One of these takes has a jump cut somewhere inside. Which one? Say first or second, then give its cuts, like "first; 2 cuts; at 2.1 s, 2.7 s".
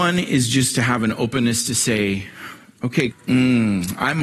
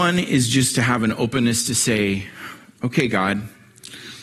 first; 1 cut; at 3.1 s